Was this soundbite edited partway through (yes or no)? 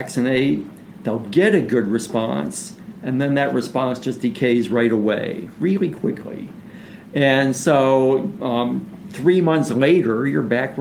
no